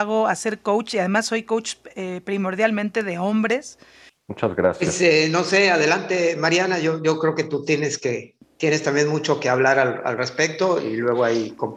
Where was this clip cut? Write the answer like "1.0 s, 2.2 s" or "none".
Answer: 4.1 s